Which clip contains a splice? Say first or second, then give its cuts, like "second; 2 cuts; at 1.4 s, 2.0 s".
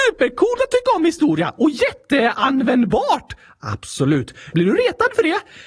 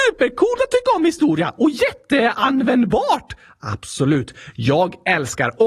first; 1 cut; at 4.5 s